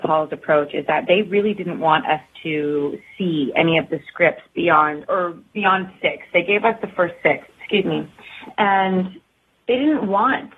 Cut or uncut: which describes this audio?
cut